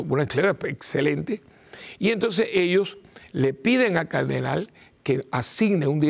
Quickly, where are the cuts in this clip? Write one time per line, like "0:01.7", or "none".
none